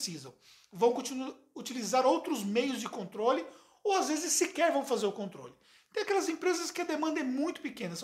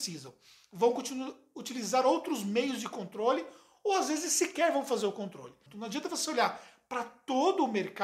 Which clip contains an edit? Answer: second; 1 cut; at 5.7 s

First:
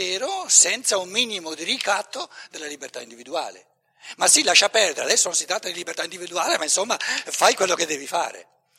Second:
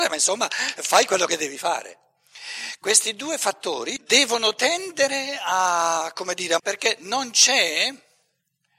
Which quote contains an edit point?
second; 3 cuts; at 2.8 s, 4.0 s, 6.6 s

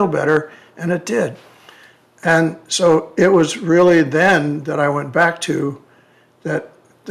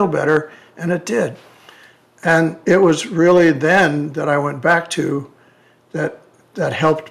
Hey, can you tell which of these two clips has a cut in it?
second; 1 cut; at 2.6 s

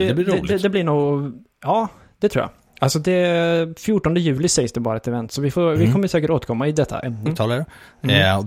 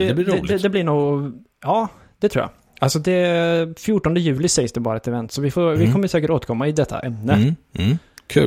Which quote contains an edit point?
first; 1 cut; at 7.3 s

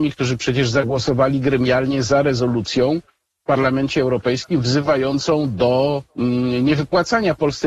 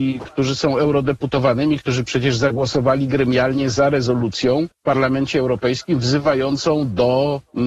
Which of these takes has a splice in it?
second; 1 cut; at 4.7 s

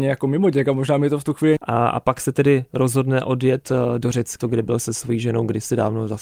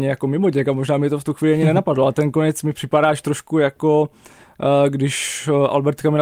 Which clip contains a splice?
first; 2 cuts; at 1.6 s, 4.4 s

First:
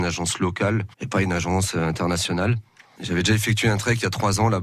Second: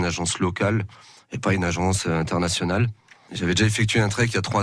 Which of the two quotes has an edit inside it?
first; 1 cut; at 0.9 s

